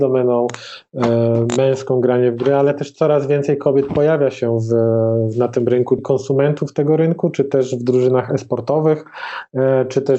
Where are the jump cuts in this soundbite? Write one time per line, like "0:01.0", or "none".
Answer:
0:06.0